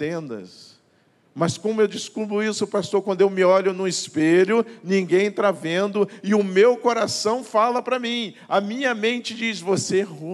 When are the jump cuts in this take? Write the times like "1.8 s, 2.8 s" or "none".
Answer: none